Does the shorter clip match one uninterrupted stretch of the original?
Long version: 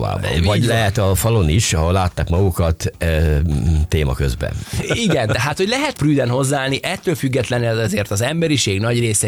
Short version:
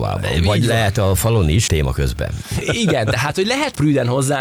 no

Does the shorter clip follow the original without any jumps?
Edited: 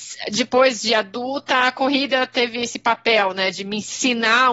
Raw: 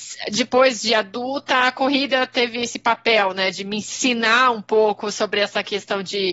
yes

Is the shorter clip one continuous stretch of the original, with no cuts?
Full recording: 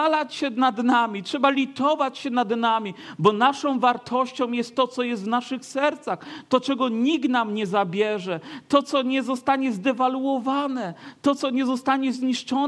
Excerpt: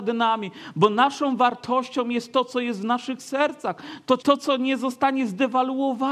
no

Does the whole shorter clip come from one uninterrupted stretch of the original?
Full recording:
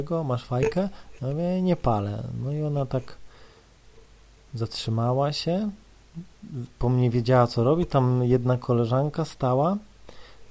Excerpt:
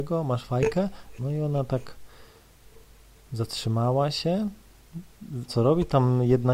no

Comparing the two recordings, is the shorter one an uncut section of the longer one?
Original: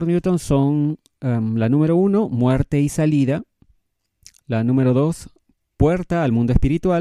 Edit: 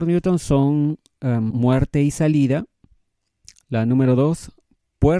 no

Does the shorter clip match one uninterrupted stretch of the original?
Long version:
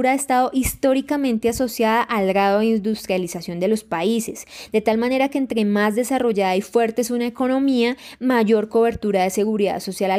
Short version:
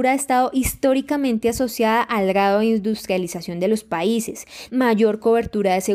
no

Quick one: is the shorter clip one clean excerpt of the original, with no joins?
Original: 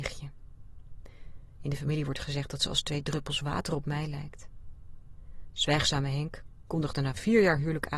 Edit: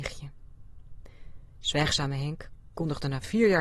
no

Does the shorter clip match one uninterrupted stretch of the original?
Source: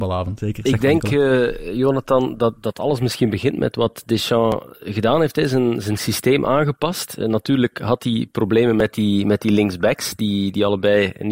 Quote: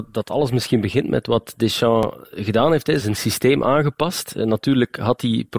no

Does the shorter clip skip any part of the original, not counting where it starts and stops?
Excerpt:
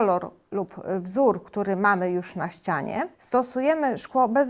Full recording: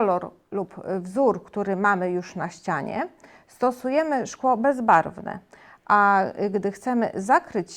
yes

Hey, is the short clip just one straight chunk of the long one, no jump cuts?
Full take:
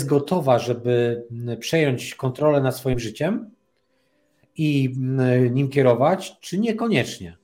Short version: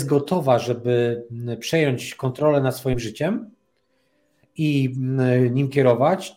yes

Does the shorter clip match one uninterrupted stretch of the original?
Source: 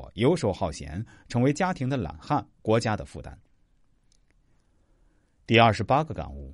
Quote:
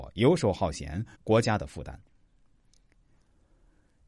no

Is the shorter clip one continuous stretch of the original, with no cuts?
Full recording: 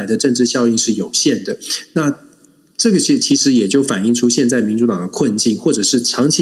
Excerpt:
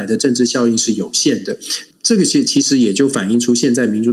no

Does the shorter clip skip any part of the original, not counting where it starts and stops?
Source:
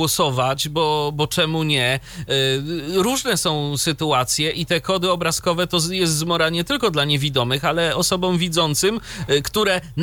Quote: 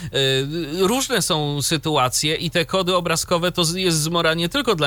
no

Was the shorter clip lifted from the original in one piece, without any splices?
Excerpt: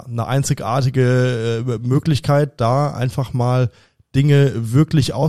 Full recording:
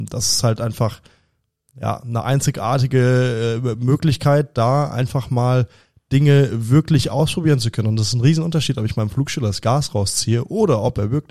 yes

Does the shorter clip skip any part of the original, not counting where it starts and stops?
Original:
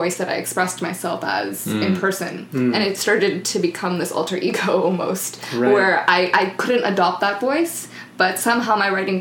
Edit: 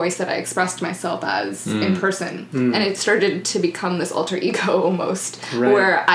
no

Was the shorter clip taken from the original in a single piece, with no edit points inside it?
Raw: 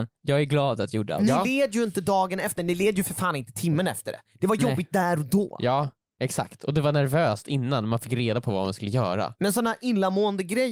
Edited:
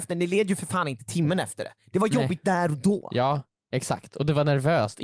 yes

